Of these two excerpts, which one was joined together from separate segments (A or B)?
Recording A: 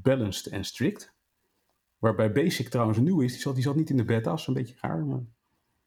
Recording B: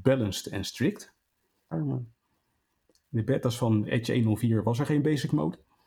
B